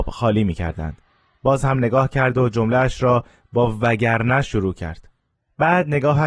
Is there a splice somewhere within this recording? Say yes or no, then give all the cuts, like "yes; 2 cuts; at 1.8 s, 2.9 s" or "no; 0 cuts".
no; 0 cuts